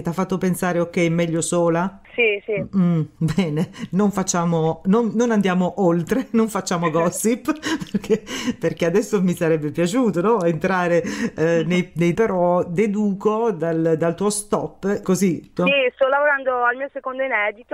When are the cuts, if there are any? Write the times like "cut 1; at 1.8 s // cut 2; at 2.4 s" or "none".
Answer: cut 1; at 12.1 s // cut 2; at 15.6 s